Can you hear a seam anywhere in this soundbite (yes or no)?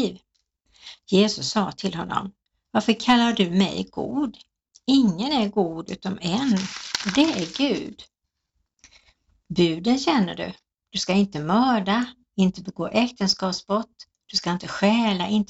no